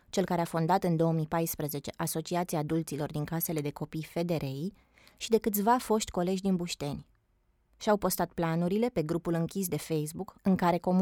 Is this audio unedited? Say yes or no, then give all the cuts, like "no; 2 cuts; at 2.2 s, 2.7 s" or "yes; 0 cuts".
yes; 0 cuts